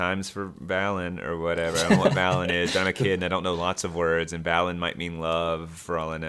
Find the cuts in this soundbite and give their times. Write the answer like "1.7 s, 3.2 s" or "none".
none